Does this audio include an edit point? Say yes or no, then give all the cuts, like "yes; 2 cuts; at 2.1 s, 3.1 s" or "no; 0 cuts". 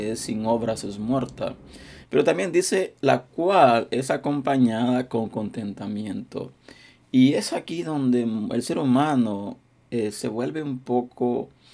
yes; 1 cut; at 2.0 s